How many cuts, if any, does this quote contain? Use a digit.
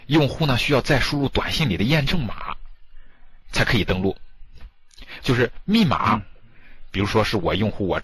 1